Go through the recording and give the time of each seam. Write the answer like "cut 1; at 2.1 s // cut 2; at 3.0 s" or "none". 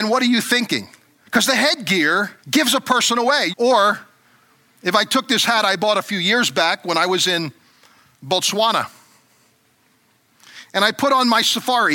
cut 1; at 1.3 s // cut 2; at 2.4 s // cut 3; at 3.5 s